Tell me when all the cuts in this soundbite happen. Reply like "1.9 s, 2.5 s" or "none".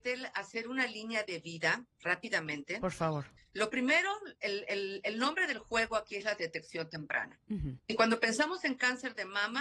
3.4 s, 7.8 s